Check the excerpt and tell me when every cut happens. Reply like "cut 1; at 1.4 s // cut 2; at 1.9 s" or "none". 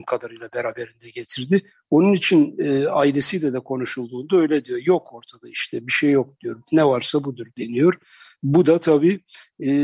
none